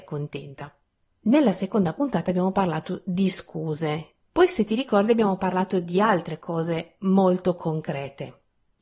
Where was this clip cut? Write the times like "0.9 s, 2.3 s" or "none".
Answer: 4.2 s